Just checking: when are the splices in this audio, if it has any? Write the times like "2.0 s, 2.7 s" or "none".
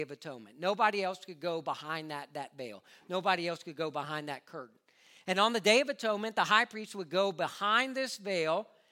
none